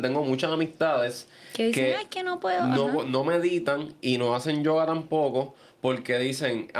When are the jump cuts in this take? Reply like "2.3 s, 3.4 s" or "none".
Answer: none